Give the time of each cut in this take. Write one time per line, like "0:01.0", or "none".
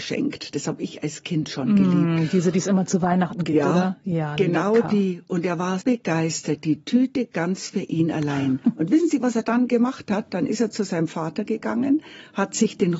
0:05.8